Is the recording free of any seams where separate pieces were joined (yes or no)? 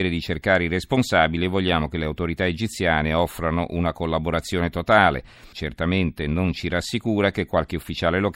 no